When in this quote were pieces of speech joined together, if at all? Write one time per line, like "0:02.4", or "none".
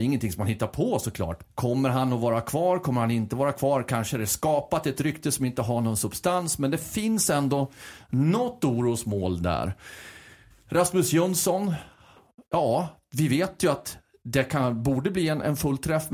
0:01.4